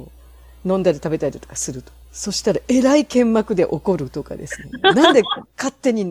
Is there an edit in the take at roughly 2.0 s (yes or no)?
yes